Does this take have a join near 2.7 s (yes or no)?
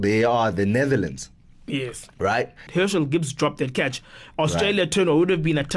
yes